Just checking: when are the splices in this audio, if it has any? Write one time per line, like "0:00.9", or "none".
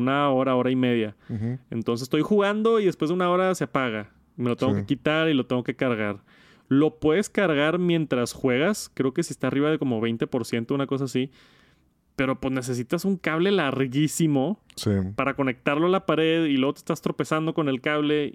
none